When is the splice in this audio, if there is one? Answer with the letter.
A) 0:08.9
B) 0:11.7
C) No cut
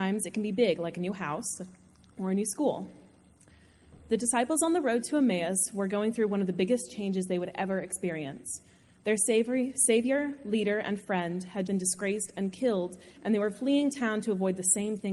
B